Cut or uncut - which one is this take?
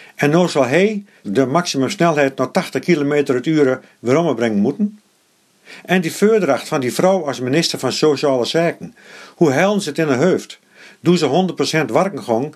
cut